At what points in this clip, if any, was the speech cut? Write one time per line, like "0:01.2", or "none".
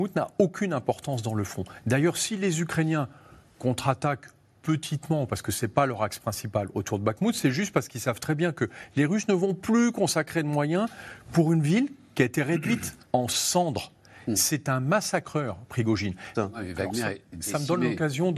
0:13.0
0:16.3